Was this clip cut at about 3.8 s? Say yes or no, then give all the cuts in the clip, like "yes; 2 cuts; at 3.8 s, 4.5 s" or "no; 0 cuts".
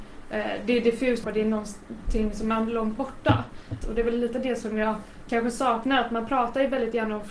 yes; 2 cuts; at 1.2 s, 3.8 s